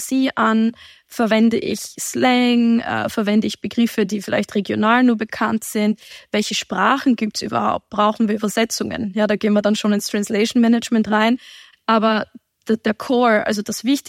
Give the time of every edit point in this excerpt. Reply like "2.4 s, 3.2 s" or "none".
11.7 s